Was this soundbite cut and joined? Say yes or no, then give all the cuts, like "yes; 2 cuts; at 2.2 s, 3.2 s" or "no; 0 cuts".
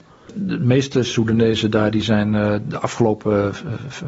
no; 0 cuts